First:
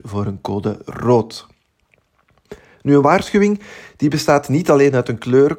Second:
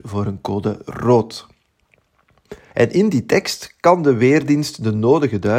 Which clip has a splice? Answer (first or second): second